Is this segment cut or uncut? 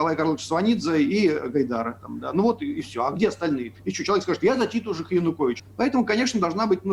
cut